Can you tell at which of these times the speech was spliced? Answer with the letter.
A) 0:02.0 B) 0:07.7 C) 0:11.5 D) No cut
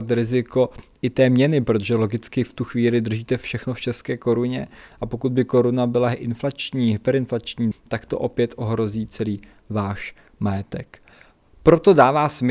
B